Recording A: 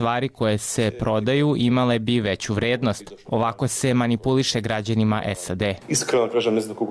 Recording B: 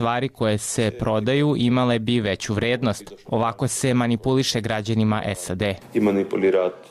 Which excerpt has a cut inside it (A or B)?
A